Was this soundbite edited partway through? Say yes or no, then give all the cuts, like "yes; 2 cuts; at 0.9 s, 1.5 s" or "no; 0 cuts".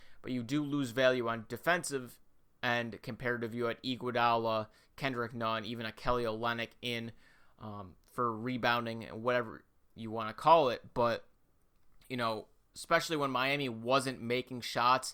no; 0 cuts